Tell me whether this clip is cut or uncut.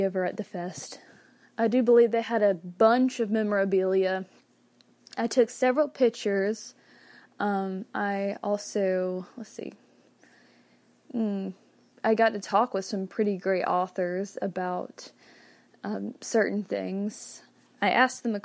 cut